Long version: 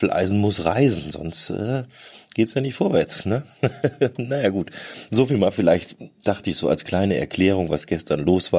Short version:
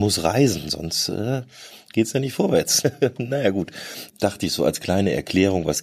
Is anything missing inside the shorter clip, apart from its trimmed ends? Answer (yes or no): yes